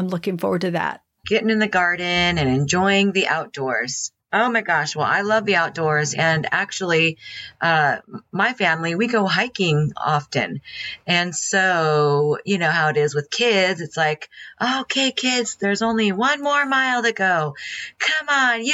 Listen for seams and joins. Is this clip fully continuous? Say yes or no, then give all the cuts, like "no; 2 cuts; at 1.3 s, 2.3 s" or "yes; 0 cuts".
no; 2 cuts; at 1.2 s, 4.2 s